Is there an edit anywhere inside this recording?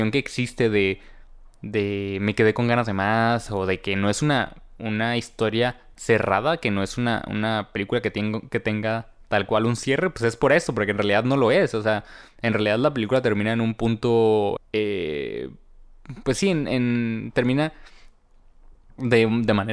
yes; 1 cut; at 14.6 s

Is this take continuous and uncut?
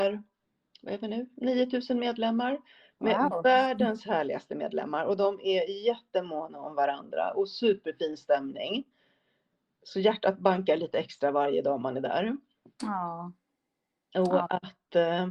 yes; 0 cuts

